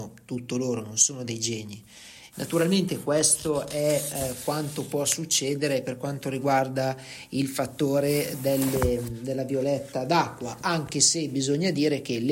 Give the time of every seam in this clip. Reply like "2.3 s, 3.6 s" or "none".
2.3 s